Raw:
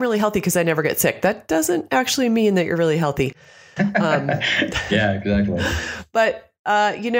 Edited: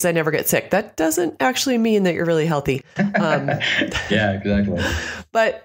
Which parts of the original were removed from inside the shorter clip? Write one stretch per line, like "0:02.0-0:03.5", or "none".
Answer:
0:03.4-0:03.7